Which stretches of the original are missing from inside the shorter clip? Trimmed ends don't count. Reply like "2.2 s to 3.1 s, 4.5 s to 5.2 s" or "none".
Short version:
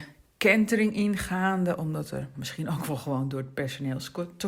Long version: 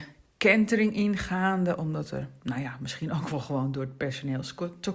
2.3 s to 2.8 s